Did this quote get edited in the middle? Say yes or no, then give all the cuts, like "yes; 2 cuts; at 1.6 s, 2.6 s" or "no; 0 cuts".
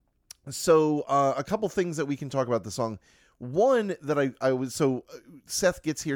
no; 0 cuts